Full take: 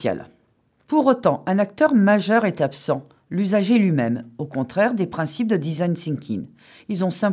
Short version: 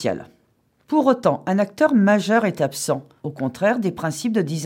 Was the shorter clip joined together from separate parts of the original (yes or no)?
yes